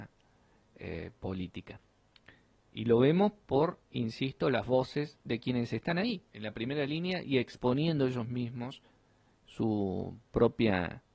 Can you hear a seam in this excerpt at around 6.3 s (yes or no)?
yes